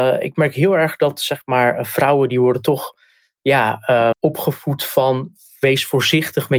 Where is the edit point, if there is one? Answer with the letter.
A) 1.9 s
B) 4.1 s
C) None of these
B